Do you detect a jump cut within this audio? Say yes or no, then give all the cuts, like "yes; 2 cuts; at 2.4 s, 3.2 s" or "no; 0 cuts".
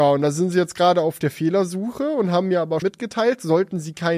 yes; 1 cut; at 2.8 s